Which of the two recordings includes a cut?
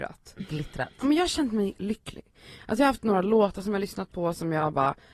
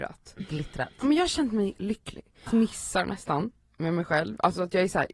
second; 1 cut; at 2.5 s

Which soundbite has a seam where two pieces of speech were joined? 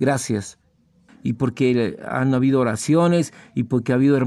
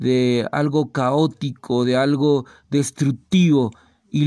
first; 1 cut; at 1.1 s

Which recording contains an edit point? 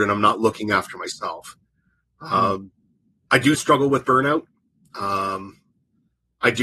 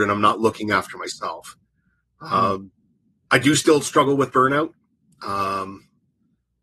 first; 1 cut; at 3.5 s

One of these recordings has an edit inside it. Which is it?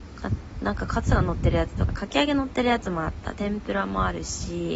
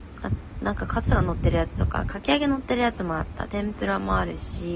first; 1 cut; at 1.9 s

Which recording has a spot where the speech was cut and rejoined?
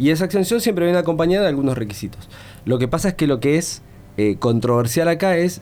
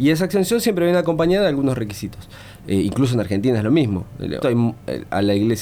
second; 2 cuts; at 2.6 s, 4.4 s

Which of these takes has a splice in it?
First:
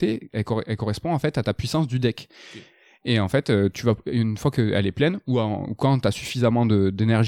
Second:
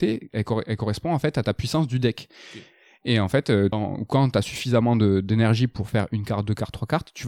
second; 1 cut; at 3.7 s

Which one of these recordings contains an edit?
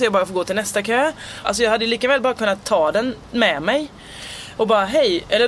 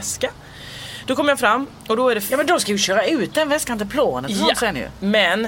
first; 2 cuts; at 1.4 s, 4.6 s

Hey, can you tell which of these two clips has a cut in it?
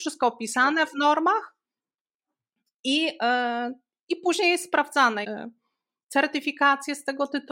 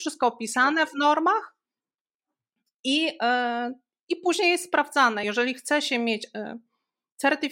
first; 1 cut; at 5.2 s

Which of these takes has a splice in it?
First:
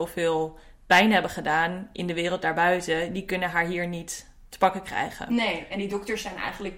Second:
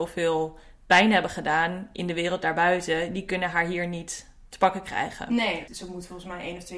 second; 1 cut; at 5.7 s

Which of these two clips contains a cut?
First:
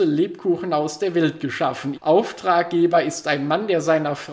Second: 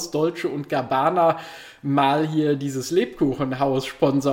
first; 1 cut; at 1.9 s

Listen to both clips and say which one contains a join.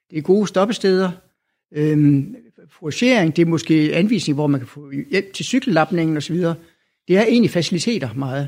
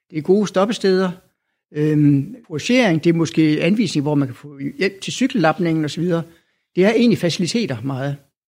second; 1 cut; at 2.4 s

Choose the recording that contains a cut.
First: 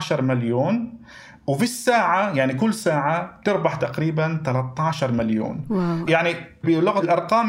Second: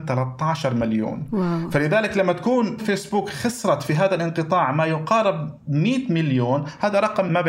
first; 1 cut; at 6.0 s

